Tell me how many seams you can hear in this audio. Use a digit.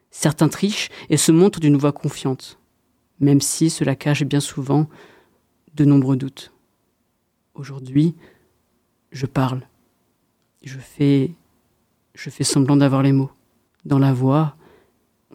1